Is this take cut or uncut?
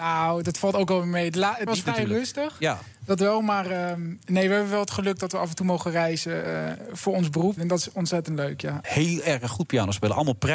cut